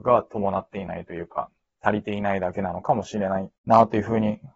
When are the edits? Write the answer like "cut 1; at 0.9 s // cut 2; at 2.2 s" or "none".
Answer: cut 1; at 3.6 s